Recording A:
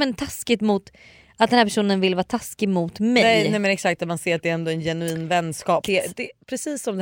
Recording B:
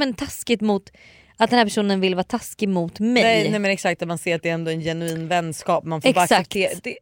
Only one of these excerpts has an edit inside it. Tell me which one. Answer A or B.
A